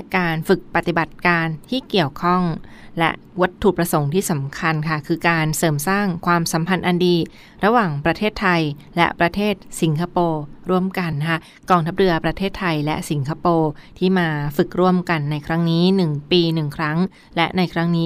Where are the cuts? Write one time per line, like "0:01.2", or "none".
0:11.1